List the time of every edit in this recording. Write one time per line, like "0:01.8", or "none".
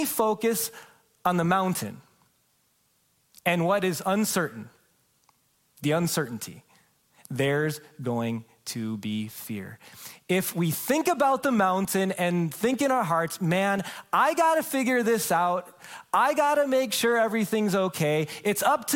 none

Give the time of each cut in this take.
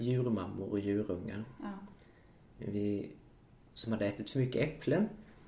0:03.7

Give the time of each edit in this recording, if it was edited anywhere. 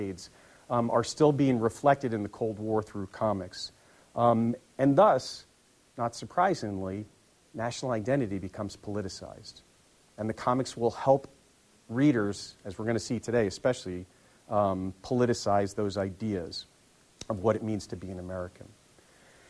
none

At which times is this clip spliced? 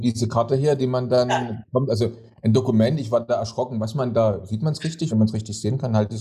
0:05.1

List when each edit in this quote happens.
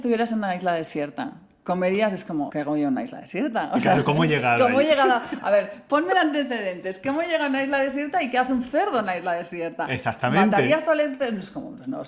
0:02.5

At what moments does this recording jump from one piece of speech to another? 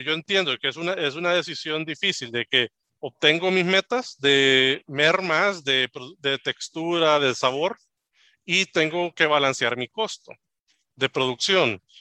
none

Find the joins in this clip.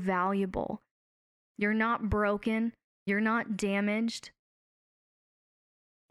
none

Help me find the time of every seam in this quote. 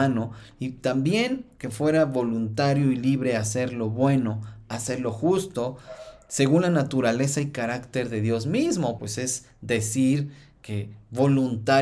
0:09.0

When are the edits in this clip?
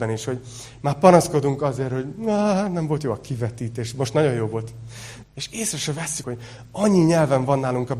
0:05.2
0:06.2

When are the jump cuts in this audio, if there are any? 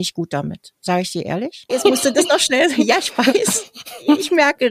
0:01.7

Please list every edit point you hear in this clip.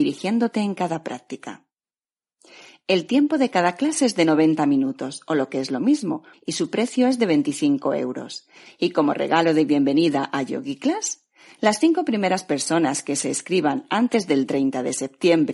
0:06.3
0:08.7

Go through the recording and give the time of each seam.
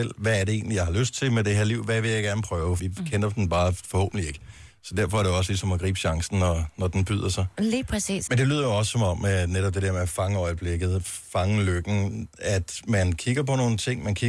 0:02.8
0:08.3

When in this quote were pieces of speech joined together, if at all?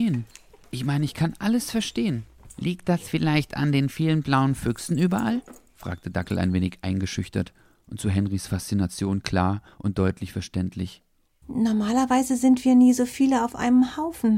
none

